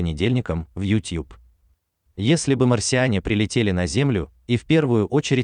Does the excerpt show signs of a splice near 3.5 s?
no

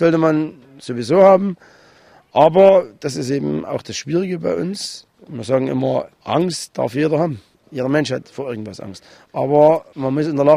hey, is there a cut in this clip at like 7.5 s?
no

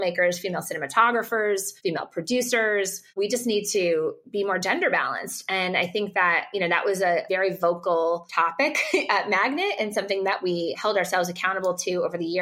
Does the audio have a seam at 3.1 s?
no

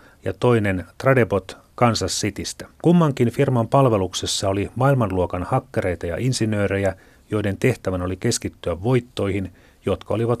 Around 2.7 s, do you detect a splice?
yes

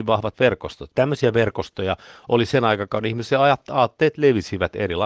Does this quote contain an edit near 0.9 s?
yes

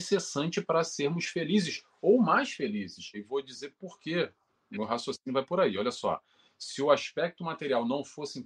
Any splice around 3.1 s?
yes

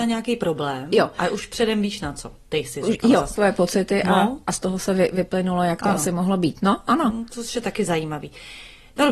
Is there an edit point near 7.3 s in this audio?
no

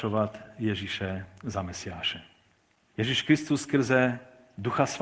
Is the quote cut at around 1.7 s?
no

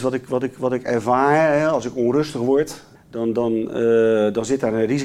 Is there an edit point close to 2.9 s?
yes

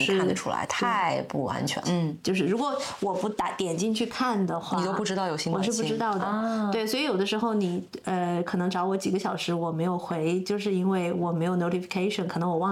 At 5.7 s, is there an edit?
no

